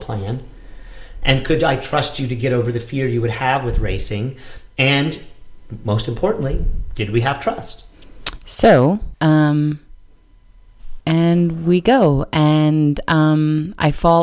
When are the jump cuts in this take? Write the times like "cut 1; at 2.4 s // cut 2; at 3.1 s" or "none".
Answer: cut 1; at 9.1 s // cut 2; at 11.0 s